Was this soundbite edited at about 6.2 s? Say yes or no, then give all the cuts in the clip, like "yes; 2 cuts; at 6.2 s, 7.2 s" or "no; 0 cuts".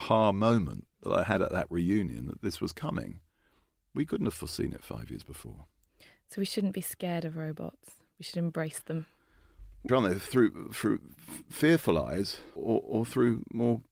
no; 2 cuts; at 9.9 s, 12.6 s